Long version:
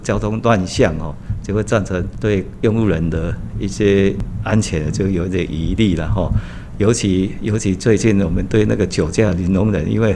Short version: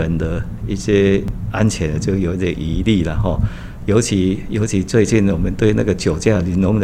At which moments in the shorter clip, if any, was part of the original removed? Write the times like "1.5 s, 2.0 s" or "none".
none